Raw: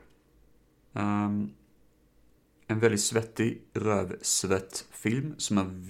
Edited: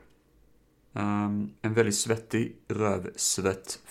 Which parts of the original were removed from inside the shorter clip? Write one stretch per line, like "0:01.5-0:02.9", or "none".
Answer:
0:01.6-0:02.6